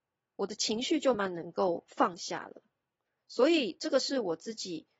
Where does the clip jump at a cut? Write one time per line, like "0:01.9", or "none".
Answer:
0:01.1

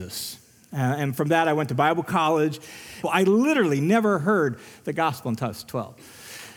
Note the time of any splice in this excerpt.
0:03.0

